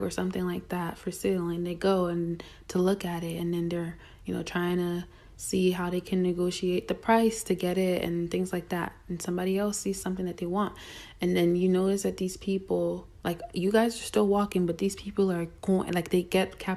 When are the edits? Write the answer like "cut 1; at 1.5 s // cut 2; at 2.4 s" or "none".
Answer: none